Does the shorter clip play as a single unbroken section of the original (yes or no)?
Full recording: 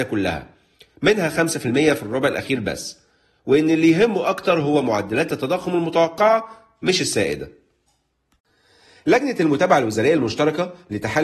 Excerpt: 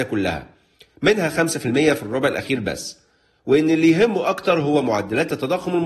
yes